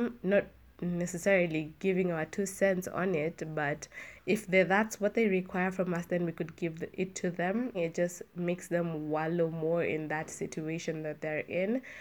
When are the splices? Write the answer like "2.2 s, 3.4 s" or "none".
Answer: 7.7 s